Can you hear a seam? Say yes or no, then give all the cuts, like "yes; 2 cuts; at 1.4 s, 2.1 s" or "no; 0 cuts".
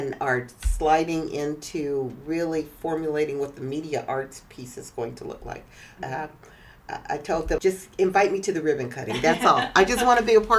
yes; 2 cuts; at 6.0 s, 7.6 s